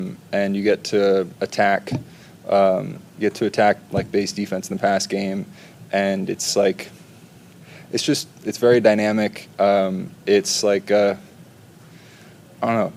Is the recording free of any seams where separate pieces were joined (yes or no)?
yes